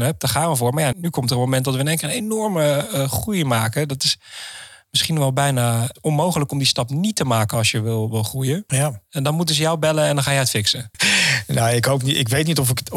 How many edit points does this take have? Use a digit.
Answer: 3